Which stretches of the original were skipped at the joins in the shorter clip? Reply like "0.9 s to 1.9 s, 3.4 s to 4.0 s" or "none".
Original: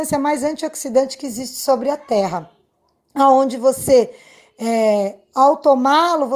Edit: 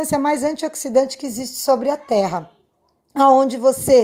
none